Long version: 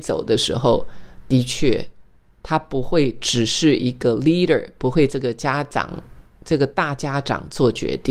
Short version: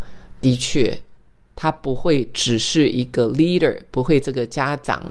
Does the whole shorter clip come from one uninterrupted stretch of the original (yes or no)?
yes